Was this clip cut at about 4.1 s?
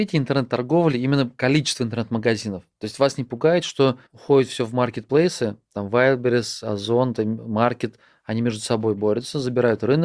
yes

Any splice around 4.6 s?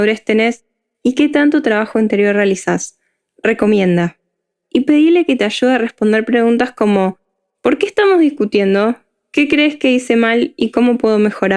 yes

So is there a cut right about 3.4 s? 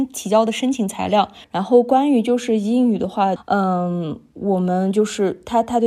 yes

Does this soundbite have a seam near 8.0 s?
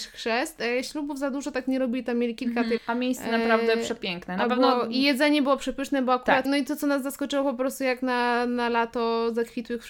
no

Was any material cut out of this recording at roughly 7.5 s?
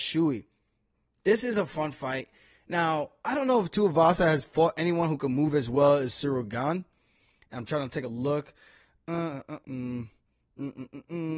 no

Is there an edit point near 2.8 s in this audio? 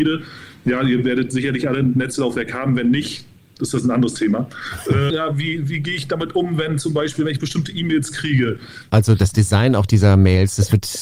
no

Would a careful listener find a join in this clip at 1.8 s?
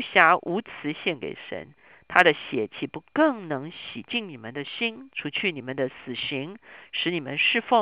no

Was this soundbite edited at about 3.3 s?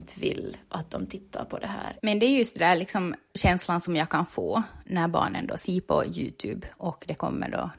yes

